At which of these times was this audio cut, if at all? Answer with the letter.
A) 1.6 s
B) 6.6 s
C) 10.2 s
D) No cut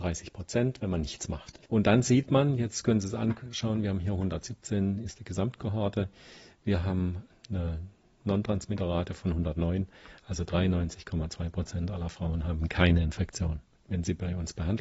A